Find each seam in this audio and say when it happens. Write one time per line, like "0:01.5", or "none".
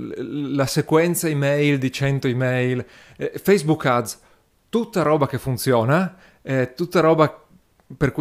none